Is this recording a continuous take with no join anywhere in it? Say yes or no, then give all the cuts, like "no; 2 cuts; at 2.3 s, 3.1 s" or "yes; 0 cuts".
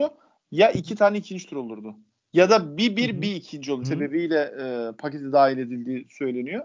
no; 1 cut; at 3.8 s